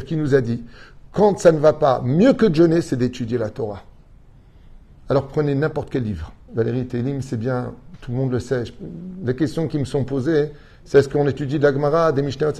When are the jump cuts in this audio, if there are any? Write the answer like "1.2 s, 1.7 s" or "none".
6.5 s